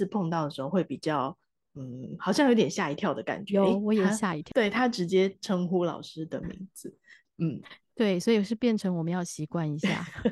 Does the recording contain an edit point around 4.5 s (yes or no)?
yes